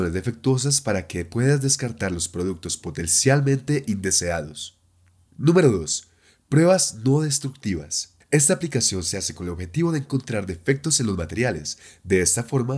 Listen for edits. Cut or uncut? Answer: uncut